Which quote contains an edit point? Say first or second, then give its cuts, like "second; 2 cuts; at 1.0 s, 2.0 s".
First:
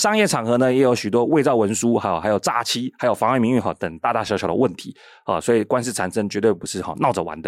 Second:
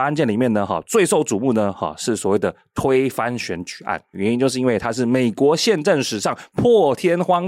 second; 1 cut; at 4.1 s